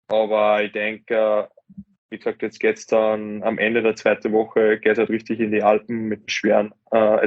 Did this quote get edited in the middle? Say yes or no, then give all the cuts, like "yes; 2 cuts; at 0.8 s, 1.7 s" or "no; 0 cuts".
yes; 1 cut; at 6.3 s